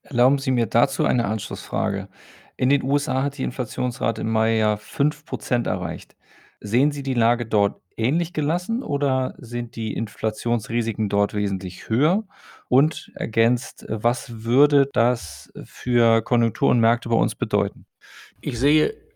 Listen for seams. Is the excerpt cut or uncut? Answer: uncut